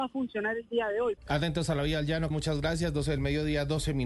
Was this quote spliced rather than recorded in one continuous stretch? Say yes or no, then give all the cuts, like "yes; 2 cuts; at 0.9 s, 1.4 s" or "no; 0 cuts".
yes; 2 cuts; at 1.2 s, 2.3 s